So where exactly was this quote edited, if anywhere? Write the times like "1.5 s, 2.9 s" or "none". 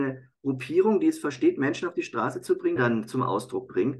2.8 s